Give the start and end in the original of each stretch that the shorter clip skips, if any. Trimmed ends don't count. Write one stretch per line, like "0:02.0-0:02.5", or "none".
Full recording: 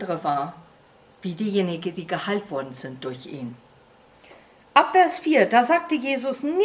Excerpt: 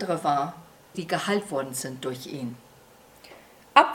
0:00.9-0:01.9